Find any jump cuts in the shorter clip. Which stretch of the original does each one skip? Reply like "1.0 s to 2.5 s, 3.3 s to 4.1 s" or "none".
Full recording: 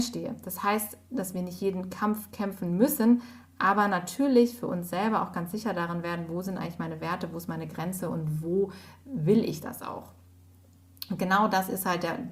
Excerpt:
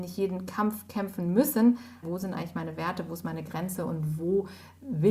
3.5 s to 6.3 s